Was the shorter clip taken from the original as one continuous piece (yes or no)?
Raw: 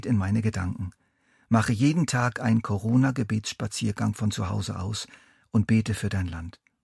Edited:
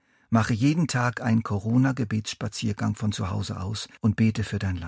no